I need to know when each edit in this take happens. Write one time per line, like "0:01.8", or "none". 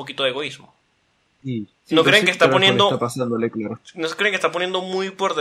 0:01.8